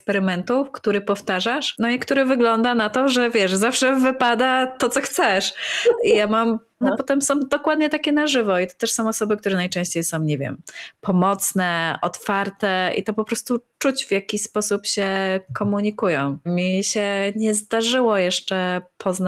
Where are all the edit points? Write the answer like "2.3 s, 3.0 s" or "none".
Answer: 6.8 s, 16.5 s